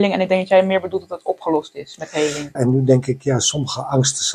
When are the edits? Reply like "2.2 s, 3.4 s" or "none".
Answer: 2.6 s

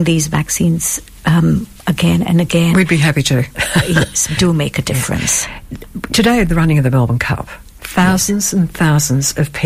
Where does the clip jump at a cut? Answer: 4.4 s

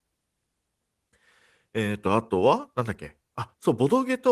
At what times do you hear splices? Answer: 3.2 s

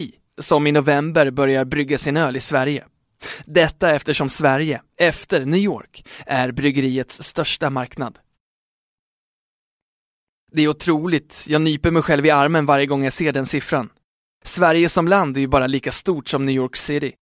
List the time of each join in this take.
none

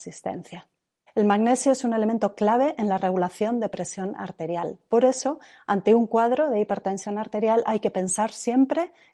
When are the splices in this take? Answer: 1.1 s

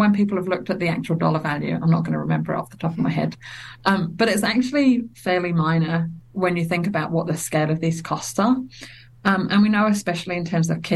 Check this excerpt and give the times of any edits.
none

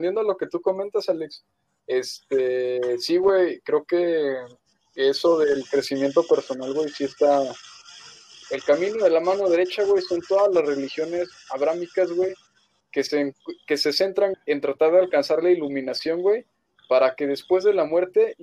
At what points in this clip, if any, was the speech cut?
8.4 s, 14.3 s

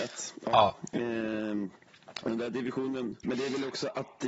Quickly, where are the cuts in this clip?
3.2 s

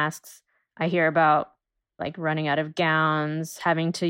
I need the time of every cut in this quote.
2.0 s

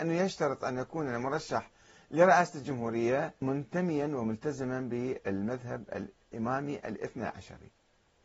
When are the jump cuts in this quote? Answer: 3.4 s

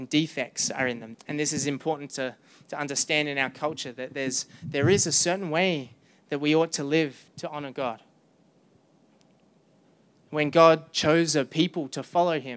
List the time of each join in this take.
1.1 s

